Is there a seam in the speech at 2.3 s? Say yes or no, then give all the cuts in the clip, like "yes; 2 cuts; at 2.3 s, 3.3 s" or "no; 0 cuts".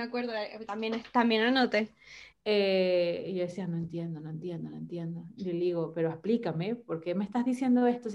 yes; 1 cut; at 2.3 s